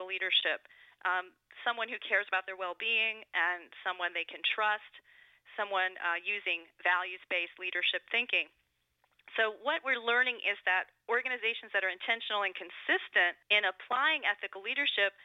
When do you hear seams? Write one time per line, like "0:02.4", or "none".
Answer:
0:13.4